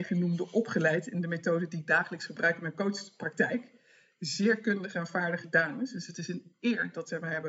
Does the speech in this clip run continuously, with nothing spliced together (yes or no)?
yes